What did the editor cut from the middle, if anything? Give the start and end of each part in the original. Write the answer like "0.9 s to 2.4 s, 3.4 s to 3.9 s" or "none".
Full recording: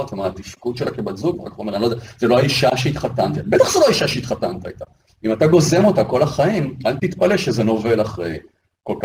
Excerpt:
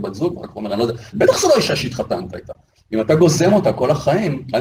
2.1 s to 3.4 s